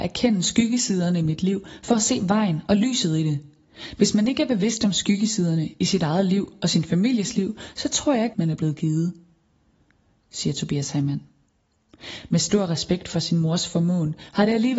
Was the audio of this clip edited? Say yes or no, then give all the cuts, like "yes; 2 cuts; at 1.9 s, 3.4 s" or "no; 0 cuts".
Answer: yes; 2 cuts; at 8.3 s, 12.3 s